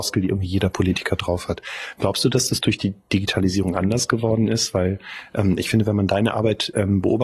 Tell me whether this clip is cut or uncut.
uncut